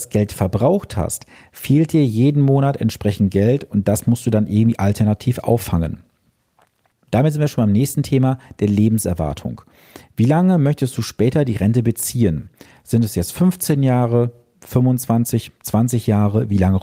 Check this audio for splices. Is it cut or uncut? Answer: cut